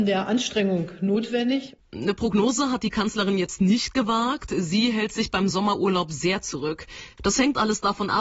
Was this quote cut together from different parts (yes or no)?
yes